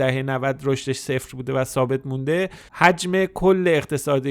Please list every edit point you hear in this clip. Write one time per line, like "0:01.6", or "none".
0:02.7